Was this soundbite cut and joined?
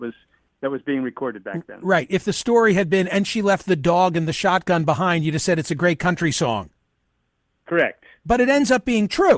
no; 0 cuts

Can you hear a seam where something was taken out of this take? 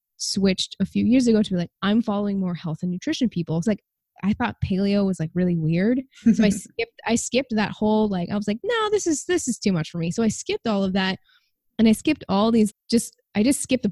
yes; 2 cuts; at 3.6 s, 12.7 s

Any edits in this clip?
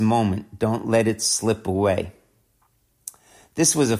no; 0 cuts

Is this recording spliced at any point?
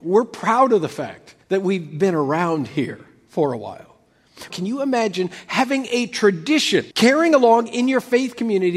yes; 3 cuts; at 1.4 s, 4.5 s, 6.9 s

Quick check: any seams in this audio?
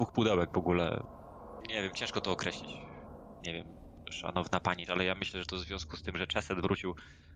yes; 3 cuts; at 1.6 s, 3.4 s, 4.9 s

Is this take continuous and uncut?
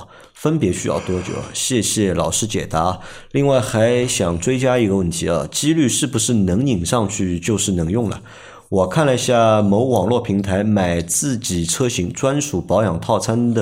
yes; 0 cuts

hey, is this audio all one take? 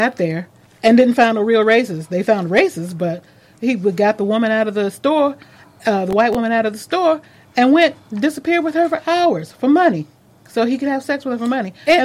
yes; 0 cuts

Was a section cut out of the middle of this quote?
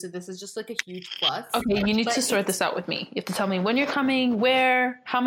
no; 0 cuts

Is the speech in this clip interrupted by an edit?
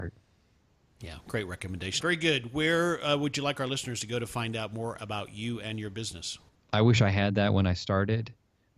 yes; 2 cuts; at 2.0 s, 6.5 s

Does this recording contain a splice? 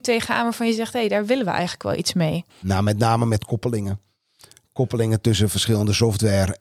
yes; 1 cut; at 2.5 s

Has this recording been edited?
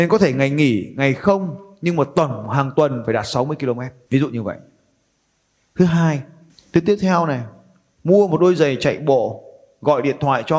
no; 0 cuts

